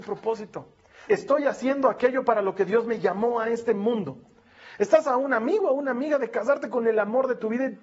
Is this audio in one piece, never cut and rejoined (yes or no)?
no